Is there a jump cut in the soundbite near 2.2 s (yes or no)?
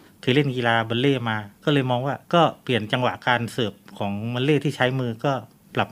yes